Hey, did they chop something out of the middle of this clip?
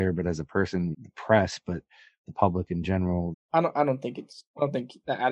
yes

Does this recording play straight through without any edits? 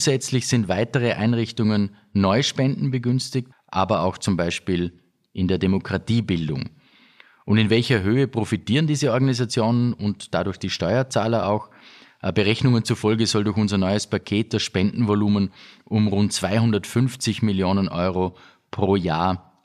no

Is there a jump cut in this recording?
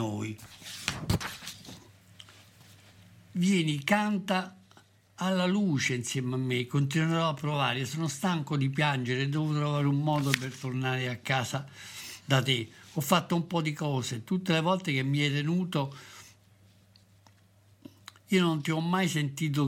no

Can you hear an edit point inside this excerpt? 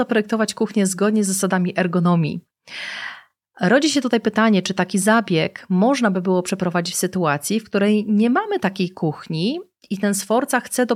no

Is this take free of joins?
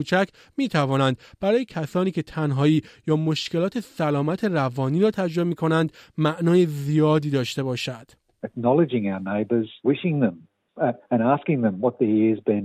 no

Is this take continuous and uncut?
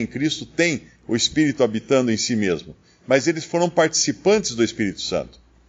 yes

